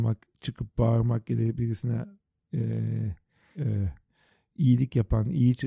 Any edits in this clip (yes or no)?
yes